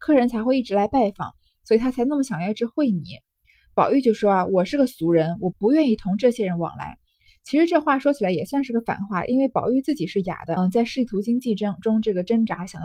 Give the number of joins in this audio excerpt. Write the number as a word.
two